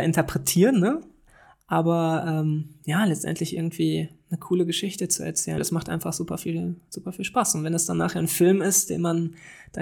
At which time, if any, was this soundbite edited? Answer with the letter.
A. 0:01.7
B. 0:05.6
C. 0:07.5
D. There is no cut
B